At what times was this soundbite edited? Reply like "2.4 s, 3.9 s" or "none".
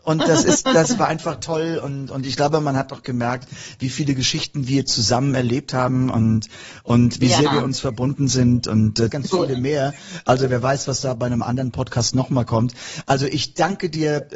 9.1 s